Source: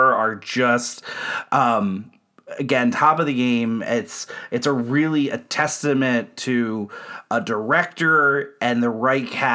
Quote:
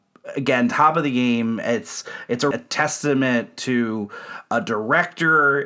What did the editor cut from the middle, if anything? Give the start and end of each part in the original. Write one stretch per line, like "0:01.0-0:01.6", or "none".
0:04.7-0:05.3